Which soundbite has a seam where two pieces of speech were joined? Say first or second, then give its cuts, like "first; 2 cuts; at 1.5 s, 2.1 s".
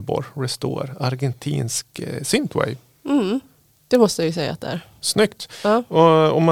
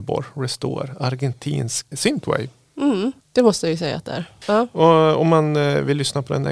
second; 3 cuts; at 1.9 s, 3.2 s, 4.4 s